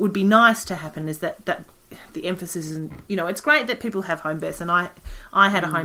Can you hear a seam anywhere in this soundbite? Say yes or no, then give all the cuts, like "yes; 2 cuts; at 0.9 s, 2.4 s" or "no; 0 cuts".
yes; 1 cut; at 1.4 s